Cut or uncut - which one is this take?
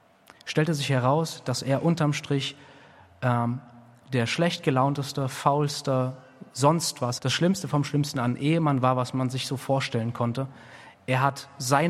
cut